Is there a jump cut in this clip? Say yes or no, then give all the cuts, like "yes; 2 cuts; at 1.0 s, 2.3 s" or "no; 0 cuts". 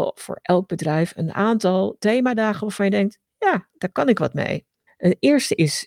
yes; 1 cut; at 4.9 s